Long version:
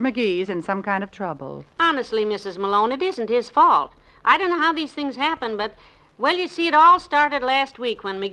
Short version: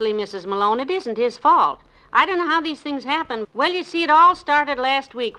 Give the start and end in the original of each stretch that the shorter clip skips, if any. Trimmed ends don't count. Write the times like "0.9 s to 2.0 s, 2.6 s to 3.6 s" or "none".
5.6 s to 6.1 s